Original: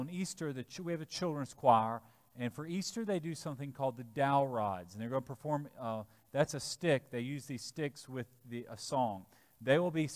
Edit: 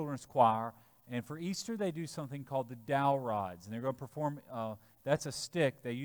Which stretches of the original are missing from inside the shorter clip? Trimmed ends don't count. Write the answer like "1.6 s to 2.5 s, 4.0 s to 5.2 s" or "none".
none